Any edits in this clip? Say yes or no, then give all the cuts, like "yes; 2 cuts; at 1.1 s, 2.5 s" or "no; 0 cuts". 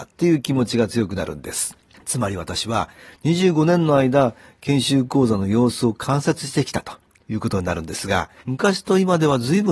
yes; 2 cuts; at 2.0 s, 8.4 s